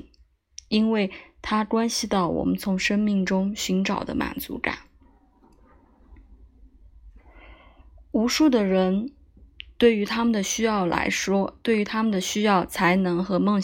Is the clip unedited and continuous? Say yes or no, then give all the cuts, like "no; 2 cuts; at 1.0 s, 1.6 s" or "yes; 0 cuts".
yes; 0 cuts